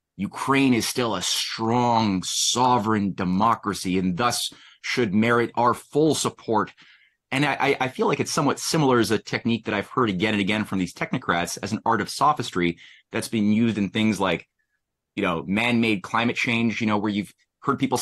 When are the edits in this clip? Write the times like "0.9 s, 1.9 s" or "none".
none